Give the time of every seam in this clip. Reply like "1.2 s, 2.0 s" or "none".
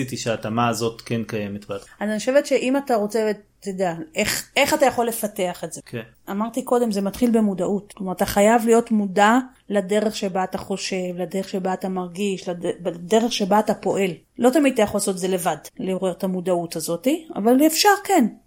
none